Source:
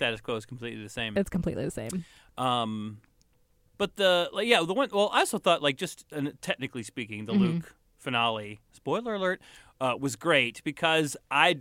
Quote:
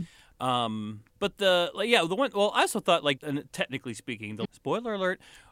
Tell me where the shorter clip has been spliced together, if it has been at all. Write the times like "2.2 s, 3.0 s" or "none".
1.1 s, 3.2 s, 4.4 s